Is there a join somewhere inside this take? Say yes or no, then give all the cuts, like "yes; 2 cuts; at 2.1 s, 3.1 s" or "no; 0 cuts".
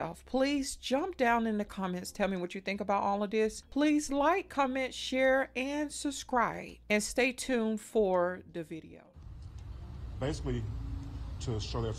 no; 0 cuts